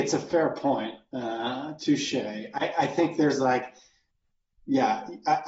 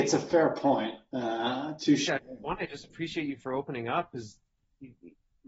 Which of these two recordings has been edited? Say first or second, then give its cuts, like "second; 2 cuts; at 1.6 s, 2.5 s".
second; 1 cut; at 2.1 s